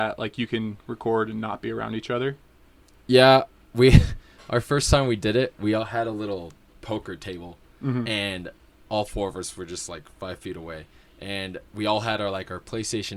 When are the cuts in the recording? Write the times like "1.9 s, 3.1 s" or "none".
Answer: none